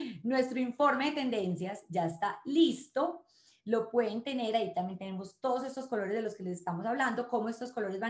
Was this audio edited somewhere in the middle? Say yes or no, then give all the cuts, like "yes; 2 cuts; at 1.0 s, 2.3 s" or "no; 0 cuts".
no; 0 cuts